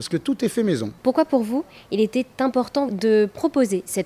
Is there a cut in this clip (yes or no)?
yes